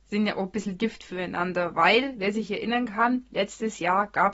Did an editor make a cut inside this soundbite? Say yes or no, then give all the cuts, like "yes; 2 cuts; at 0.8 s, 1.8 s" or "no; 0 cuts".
no; 0 cuts